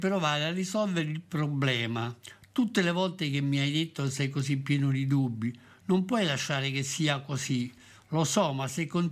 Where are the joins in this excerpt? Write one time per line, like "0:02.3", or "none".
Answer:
none